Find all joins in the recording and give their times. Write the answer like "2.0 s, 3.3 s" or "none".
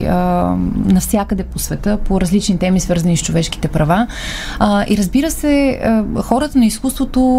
none